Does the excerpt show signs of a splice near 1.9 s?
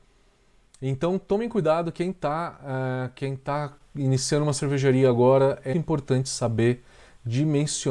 no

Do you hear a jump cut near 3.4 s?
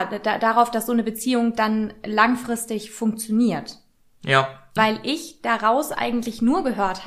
no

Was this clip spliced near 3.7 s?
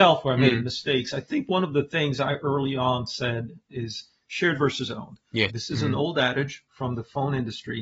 yes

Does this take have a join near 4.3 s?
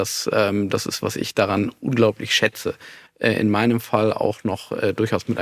no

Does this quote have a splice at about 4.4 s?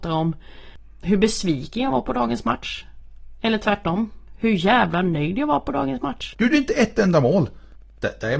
no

